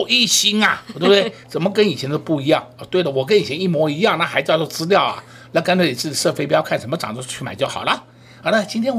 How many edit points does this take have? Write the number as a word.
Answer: zero